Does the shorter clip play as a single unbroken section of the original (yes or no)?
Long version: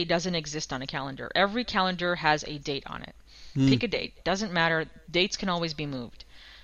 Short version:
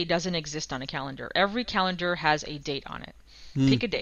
yes